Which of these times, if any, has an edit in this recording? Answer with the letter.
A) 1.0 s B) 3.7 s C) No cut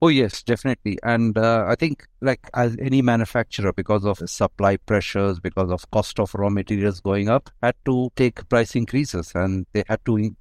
C